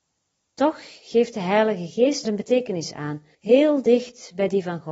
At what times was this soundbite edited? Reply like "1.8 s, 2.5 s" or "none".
2.2 s, 3.3 s

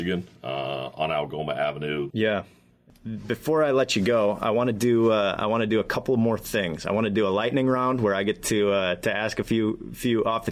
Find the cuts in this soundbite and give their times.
2.1 s

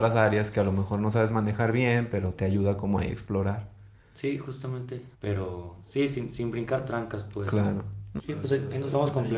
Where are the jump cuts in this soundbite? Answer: 5.1 s, 8.2 s

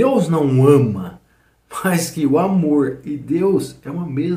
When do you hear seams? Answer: none

